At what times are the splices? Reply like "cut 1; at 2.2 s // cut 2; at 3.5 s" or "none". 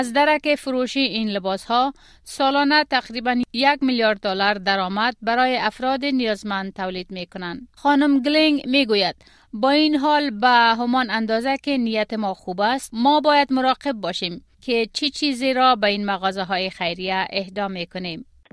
cut 1; at 7.8 s // cut 2; at 14.5 s